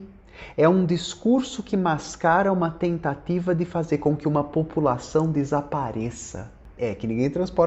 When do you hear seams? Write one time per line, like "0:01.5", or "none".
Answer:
0:06.8